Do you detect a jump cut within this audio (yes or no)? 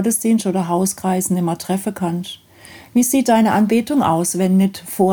no